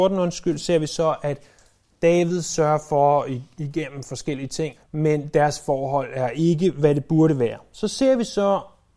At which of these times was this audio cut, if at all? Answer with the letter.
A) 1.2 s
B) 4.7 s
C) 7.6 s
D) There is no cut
B